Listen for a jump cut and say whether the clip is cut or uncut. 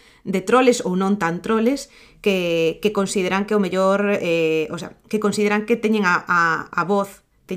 uncut